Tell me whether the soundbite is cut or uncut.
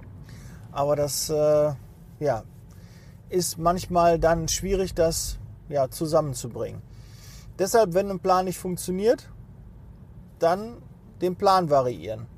uncut